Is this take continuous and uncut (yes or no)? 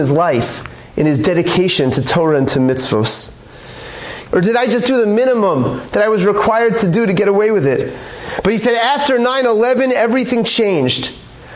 no